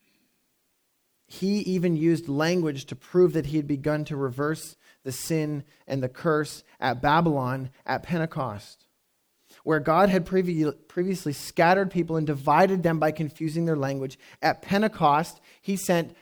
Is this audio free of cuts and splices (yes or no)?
yes